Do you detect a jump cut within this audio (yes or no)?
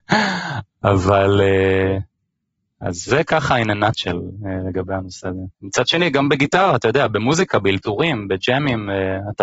yes